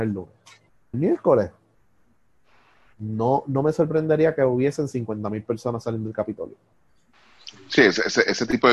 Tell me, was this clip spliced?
yes; 1 cut; at 0.9 s

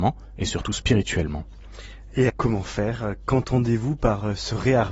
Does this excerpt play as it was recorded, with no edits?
no; 1 cut; at 2.3 s

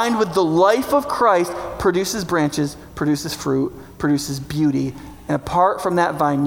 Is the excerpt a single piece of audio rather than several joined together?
yes; 0 cuts

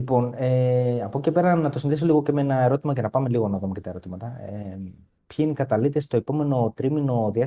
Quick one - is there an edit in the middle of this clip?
no; 0 cuts

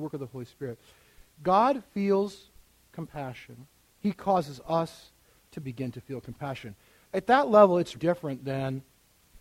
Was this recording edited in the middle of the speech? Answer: yes; 2 cuts; at 3.8 s, 7.9 s

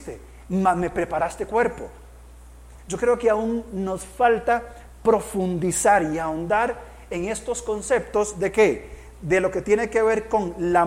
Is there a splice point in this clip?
yes; 1 cut; at 2.8 s

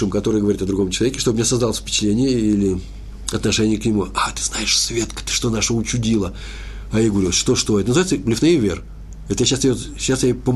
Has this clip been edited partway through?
no; 0 cuts

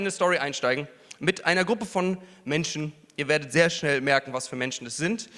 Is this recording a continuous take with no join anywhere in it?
yes; 0 cuts

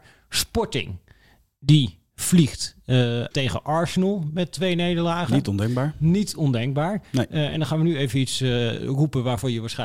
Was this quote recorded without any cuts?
no; 1 cut; at 3.3 s

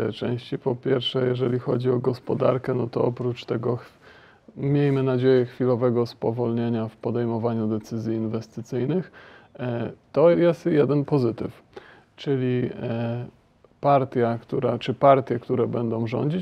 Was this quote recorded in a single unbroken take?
no; 1 cut; at 10.3 s

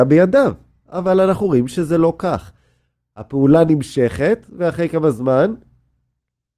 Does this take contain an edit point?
no; 0 cuts

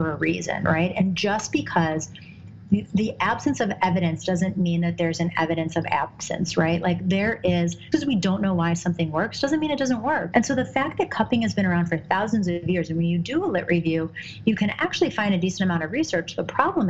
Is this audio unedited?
no; 2 cuts; at 7.9 s, 10.3 s

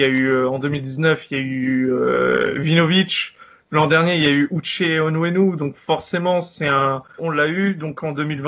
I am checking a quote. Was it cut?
yes; 1 cut; at 7.2 s

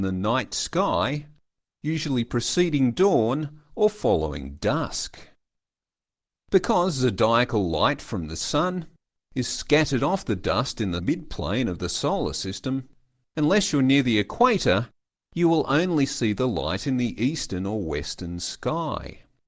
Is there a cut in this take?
yes; 2 cuts; at 6.4 s, 13.2 s

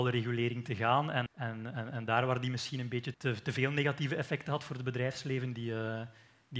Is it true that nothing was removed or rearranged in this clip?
no; 2 cuts; at 1.3 s, 3.1 s

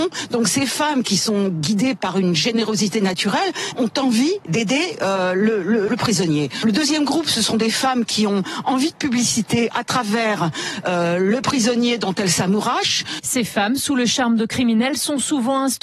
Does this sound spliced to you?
yes; 2 cuts; at 5.9 s, 13.2 s

